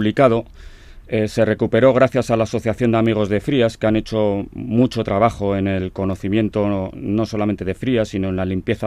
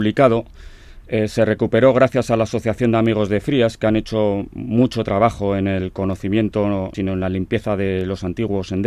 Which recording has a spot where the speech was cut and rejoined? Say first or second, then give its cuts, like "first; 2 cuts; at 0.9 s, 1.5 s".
second; 1 cut; at 6.9 s